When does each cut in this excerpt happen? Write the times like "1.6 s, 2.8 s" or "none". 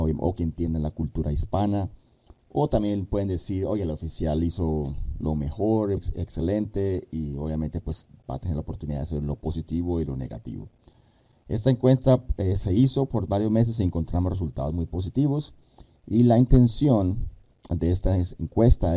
6.0 s